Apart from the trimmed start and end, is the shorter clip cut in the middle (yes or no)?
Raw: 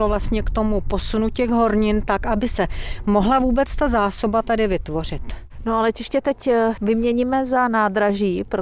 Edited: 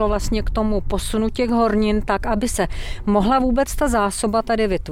no